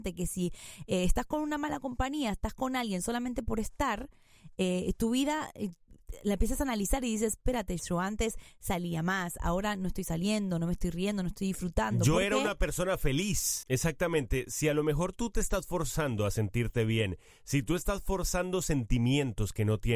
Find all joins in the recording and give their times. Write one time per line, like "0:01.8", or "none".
0:07.8
0:13.6